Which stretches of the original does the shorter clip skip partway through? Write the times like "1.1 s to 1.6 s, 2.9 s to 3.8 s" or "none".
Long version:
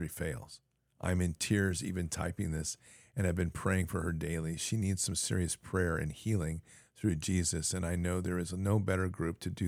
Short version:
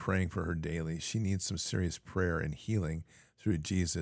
none